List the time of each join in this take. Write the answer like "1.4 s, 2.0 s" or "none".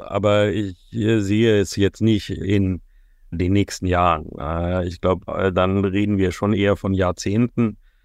5.3 s